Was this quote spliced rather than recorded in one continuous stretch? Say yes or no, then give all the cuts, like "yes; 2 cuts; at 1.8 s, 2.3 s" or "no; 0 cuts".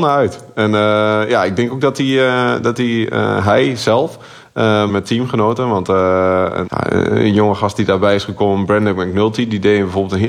yes; 2 cuts; at 4.9 s, 6.6 s